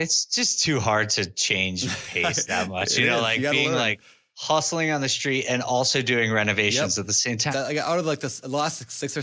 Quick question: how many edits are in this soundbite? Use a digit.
1